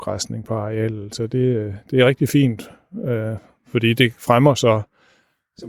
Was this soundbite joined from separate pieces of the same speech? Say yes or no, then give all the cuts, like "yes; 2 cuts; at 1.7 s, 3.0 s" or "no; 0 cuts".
no; 0 cuts